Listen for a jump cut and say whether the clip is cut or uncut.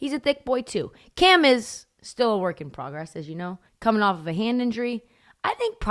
cut